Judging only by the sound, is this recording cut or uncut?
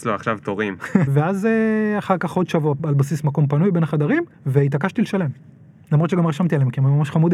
cut